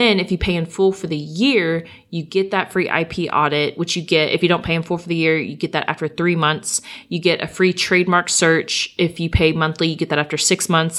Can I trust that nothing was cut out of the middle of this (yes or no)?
yes